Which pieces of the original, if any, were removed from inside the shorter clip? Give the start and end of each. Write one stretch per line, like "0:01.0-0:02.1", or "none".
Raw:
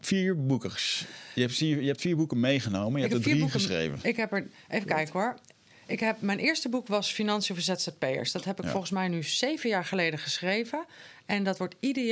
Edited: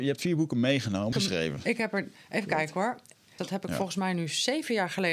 0:02.9-0:03.5
0:05.8-0:08.3